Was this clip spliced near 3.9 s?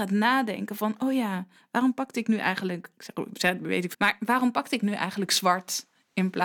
yes; 1 cut; at 3.9 s

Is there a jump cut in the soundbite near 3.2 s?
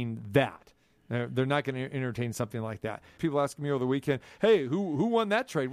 yes; 1 cut; at 3.2 s

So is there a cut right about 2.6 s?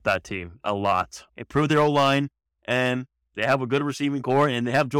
no; 1 cut; at 1.3 s

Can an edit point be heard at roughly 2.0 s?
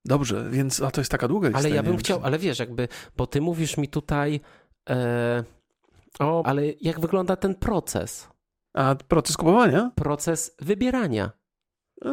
no; 1 cut; at 6.4 s

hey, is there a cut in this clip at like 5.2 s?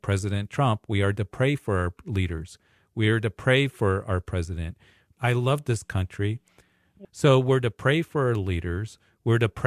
yes; 2 cuts; at 5.2 s, 7.0 s

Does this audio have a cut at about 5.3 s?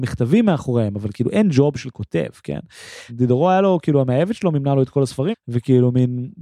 yes; 2 cuts; at 3.1 s, 5.3 s

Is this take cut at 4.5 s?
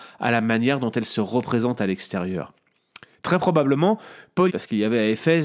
yes; 1 cut; at 4.5 s

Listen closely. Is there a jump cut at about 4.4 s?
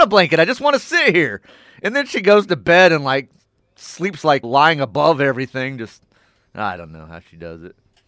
yes; 1 cut; at 4.4 s

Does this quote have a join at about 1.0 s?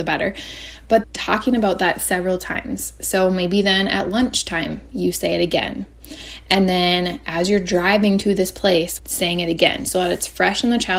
yes; 2 cuts; at 1.0 s, 9.0 s

